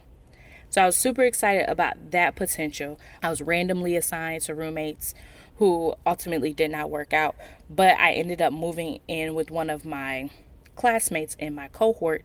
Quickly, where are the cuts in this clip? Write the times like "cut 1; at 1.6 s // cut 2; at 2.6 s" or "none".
cut 1; at 3.2 s